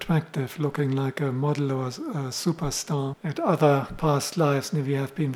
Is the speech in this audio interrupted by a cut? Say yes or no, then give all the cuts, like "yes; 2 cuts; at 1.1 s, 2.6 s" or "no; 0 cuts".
yes; 1 cut; at 3.1 s